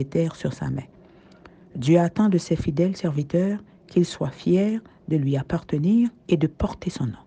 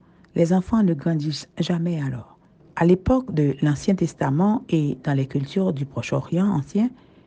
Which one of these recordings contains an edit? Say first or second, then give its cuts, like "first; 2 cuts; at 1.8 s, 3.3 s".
second; 1 cut; at 2.6 s